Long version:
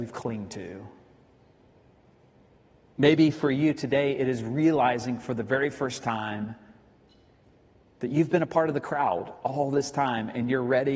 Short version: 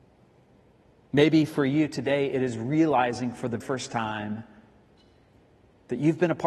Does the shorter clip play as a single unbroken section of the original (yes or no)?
no